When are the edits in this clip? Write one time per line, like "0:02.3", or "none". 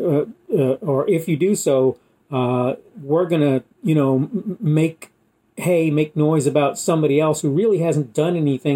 0:03.7